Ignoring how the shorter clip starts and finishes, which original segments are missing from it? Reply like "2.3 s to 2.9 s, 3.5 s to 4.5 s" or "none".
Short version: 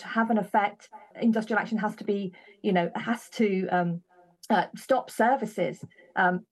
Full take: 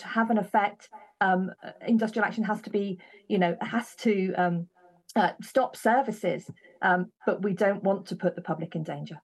1.1 s to 1.8 s